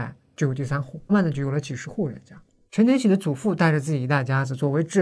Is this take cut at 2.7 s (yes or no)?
yes